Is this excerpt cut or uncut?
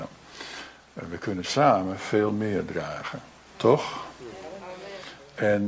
uncut